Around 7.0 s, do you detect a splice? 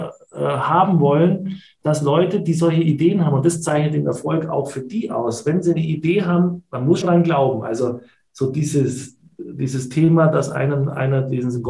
yes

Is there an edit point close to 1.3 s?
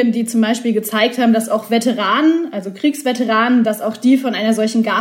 no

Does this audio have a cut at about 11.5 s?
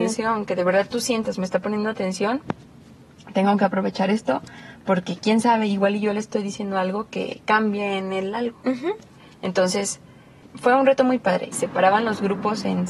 yes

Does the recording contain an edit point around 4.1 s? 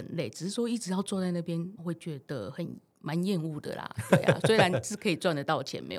no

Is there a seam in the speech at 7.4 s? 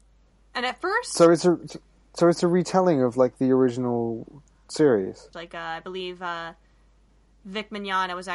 no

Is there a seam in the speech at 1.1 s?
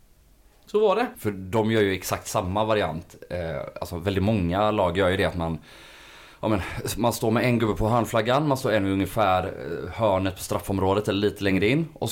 yes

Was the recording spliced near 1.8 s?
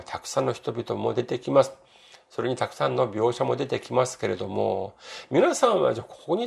no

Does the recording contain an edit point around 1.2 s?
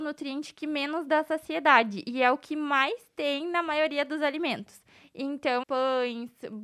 no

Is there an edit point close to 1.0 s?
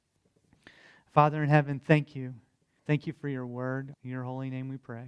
no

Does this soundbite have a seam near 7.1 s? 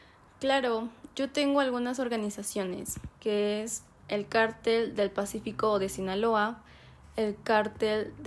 no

